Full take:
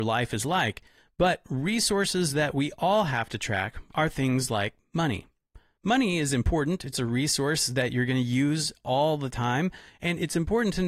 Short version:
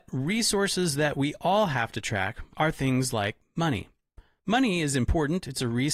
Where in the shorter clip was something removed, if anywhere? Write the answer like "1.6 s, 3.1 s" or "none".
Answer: none